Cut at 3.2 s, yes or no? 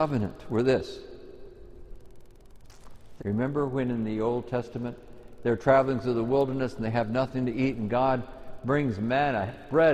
yes